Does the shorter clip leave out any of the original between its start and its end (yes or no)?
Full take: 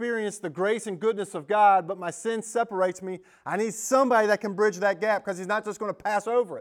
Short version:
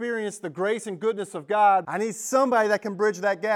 yes